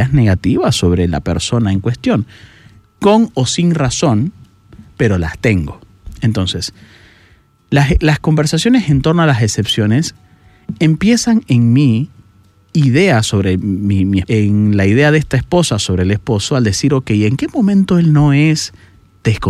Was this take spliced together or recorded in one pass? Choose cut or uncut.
cut